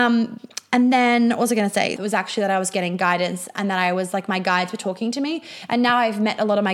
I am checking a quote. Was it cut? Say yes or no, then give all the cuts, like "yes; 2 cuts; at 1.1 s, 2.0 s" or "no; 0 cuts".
yes; 1 cut; at 2.0 s